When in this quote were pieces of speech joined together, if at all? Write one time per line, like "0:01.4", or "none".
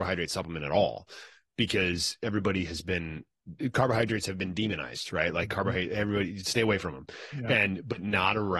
none